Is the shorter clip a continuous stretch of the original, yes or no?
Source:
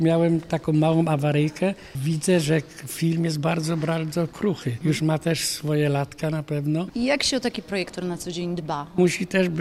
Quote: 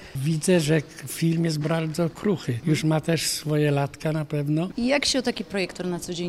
no